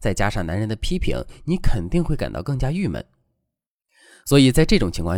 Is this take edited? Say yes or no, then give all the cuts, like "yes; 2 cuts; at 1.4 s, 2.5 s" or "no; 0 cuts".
no; 0 cuts